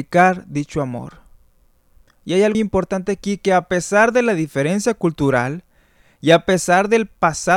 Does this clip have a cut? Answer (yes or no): yes